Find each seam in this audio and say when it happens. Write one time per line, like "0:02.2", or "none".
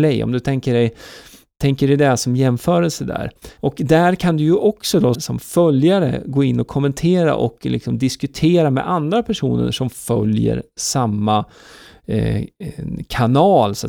0:03.6
0:05.1